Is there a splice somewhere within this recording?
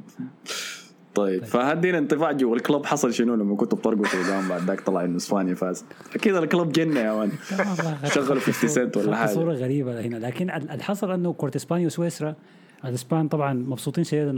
no; 0 cuts

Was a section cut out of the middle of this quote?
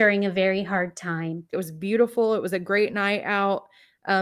yes; 1 cut; at 1.5 s

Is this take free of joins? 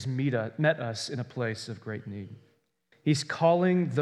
no; 1 cut; at 2.9 s

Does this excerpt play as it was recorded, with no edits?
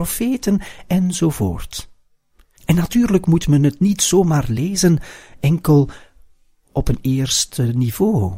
no; 1 cut; at 2.6 s

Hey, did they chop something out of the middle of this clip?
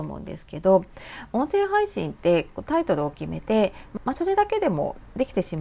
yes; 1 cut; at 4.0 s

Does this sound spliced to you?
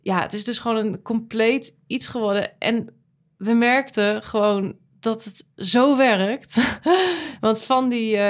no; 0 cuts

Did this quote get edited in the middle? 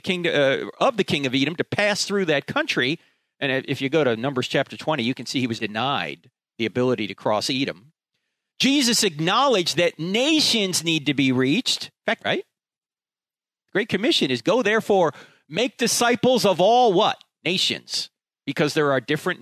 yes; 2 cuts; at 5.6 s, 12.2 s

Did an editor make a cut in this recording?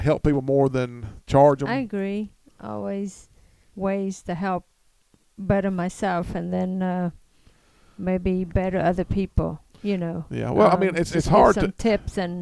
yes; 1 cut; at 3.7 s

